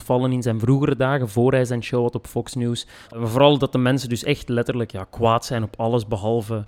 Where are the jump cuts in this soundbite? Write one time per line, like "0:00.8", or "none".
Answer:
0:03.1